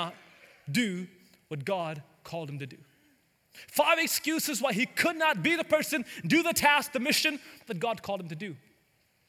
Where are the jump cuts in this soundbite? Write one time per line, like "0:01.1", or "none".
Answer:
none